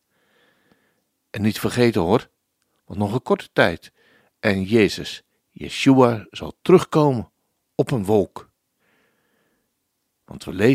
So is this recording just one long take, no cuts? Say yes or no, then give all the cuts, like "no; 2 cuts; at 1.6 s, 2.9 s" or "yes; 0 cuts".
yes; 0 cuts